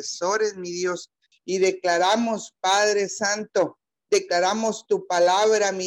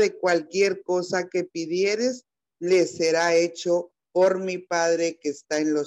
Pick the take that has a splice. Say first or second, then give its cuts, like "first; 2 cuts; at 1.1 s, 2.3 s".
first; 1 cut; at 1.3 s